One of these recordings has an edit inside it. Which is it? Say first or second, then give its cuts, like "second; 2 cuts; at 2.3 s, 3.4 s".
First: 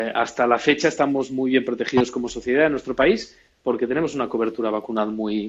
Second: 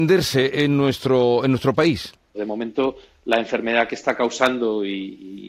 second; 1 cut; at 2.3 s